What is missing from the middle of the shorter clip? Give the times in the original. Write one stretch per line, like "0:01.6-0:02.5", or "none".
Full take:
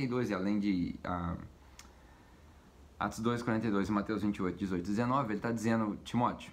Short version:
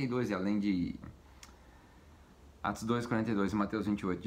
0:01.0-0:01.4

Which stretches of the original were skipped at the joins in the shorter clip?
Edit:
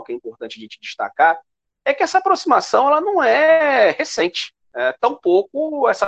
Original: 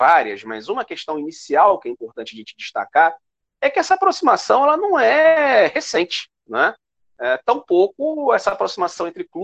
0:06.4-0:07.1

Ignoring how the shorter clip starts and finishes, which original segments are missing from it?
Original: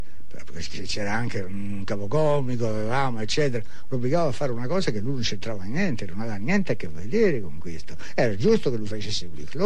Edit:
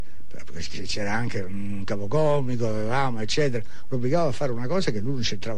none

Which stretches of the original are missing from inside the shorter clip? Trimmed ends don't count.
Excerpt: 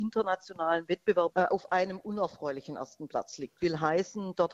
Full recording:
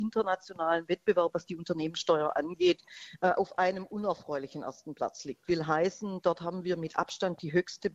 0:01.3-0:03.2

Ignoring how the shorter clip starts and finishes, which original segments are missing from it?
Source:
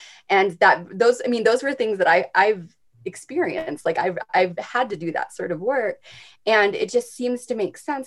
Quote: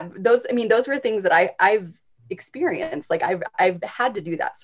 none

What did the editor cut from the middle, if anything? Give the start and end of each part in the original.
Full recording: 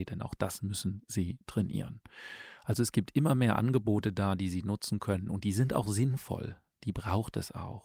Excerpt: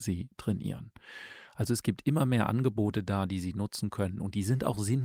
none

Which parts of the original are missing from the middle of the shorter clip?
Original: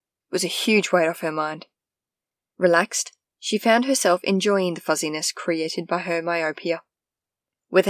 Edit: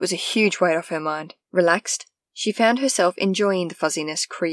0:01.7-0:02.5

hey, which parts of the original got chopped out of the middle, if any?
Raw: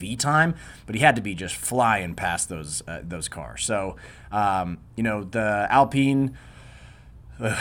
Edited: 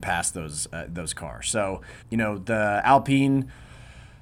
0:04.2-0:04.9

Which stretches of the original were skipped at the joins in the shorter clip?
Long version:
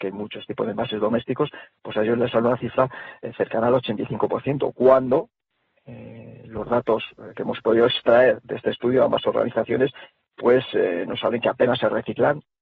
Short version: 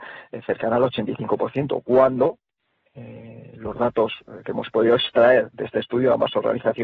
none

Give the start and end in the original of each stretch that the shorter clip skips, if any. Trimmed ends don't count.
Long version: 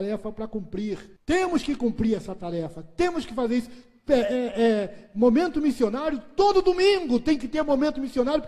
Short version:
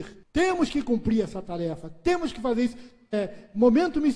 0:04.1-0:04.7

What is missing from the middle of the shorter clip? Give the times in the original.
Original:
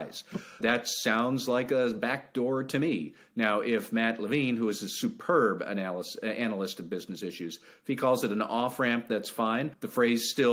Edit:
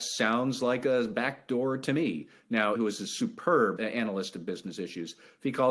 0:03.6-0:04.6
0:05.6-0:06.2

